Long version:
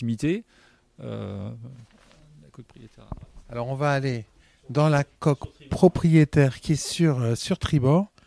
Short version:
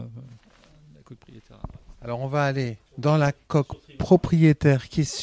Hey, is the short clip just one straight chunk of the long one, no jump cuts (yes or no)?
no